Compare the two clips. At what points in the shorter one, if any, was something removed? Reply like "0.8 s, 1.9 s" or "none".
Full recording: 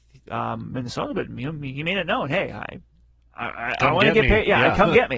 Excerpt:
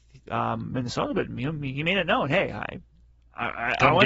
none